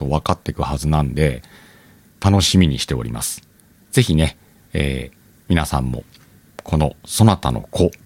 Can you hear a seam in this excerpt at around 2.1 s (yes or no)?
yes